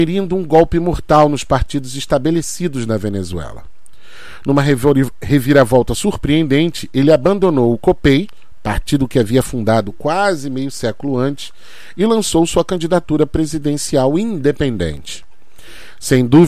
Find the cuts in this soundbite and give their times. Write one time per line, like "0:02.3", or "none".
none